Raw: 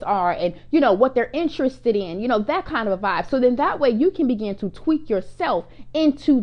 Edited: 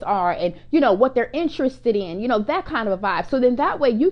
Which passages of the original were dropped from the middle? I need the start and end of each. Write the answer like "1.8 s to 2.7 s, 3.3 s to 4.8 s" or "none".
none